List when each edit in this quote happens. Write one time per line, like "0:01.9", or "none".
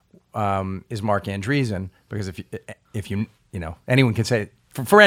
0:02.9